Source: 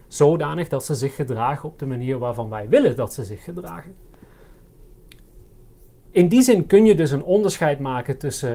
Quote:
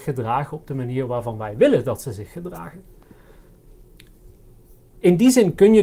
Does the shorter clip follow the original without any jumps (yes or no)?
yes